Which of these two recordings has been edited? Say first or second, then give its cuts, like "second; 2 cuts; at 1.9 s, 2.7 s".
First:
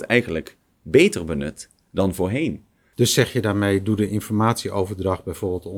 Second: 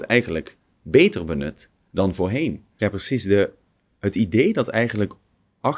second; 1 cut; at 2.8 s